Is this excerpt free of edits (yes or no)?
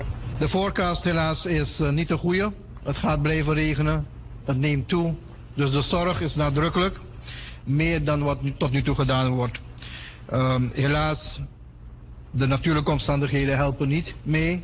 no